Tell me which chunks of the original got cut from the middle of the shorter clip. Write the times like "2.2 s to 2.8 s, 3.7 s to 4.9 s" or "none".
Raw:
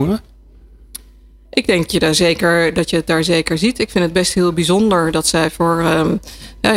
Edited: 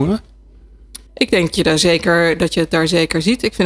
1.1 s to 1.4 s